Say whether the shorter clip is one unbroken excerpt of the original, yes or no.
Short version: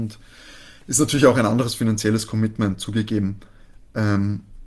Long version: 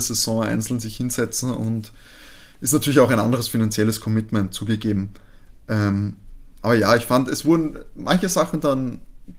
yes